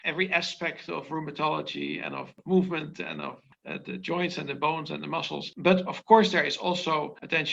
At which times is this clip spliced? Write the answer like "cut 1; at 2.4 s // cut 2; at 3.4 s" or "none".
none